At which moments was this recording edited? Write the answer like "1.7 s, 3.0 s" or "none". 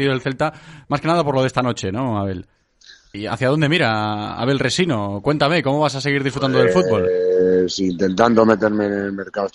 3.1 s